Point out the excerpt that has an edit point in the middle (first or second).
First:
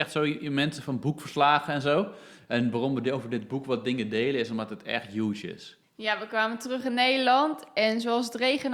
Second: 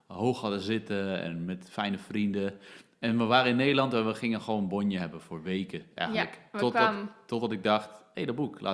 first